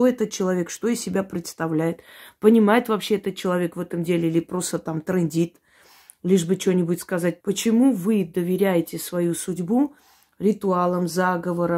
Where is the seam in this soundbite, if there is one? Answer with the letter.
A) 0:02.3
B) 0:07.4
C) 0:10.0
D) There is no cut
B